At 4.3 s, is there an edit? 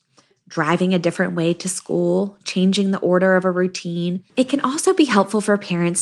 yes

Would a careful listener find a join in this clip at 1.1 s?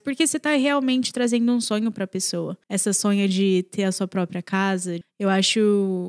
no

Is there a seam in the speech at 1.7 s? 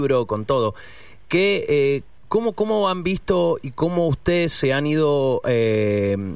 no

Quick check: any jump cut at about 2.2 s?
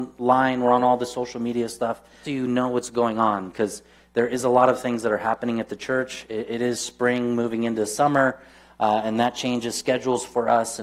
yes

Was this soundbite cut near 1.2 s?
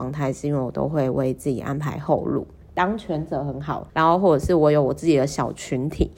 no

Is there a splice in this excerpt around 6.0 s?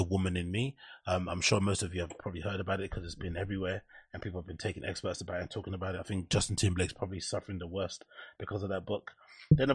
no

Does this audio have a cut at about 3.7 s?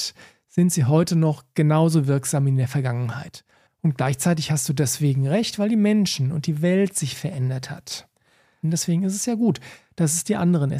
yes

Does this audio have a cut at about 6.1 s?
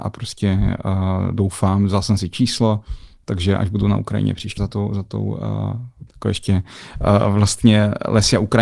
yes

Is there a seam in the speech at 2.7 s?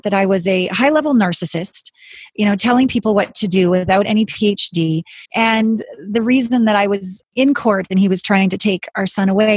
no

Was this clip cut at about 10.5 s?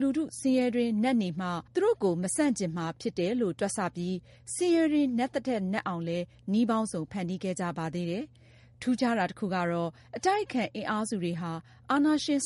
no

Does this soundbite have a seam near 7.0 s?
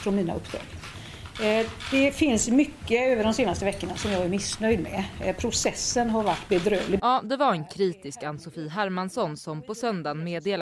yes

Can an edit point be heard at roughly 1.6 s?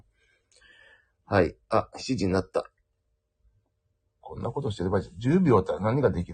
no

